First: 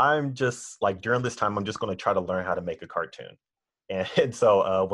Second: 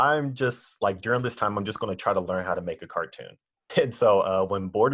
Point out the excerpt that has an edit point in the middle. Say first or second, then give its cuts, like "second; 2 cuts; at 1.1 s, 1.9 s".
second; 1 cut; at 3.7 s